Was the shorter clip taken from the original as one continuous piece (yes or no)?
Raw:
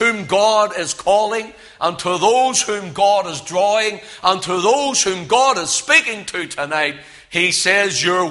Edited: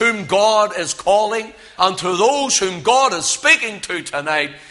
no